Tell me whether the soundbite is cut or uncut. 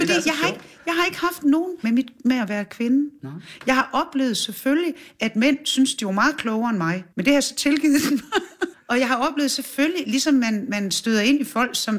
cut